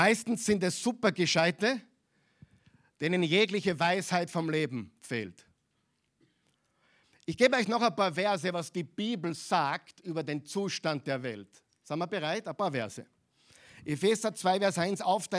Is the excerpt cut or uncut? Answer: uncut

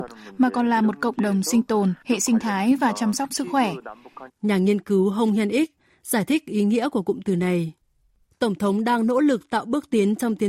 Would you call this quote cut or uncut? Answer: cut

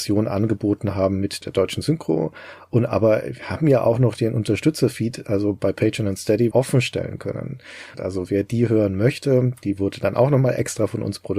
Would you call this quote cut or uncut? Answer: cut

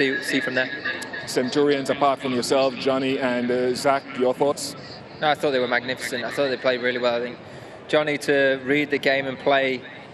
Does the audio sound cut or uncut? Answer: uncut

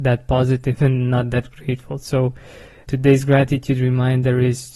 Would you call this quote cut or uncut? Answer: cut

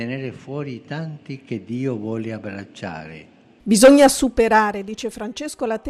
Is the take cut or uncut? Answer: cut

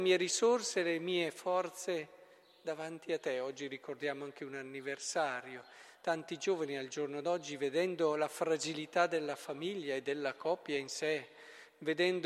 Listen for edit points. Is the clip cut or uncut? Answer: uncut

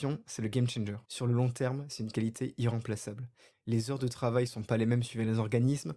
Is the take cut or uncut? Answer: cut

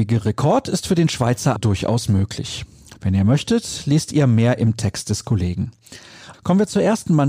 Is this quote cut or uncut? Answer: cut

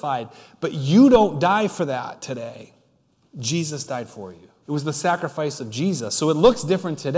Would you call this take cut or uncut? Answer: cut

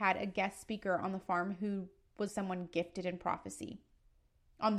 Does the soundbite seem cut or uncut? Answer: cut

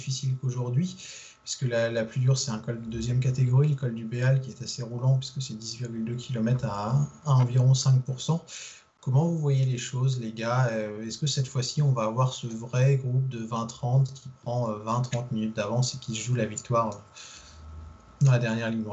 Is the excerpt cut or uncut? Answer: uncut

